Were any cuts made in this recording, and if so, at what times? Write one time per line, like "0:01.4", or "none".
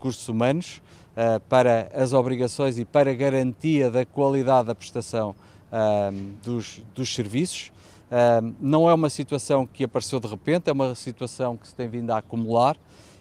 none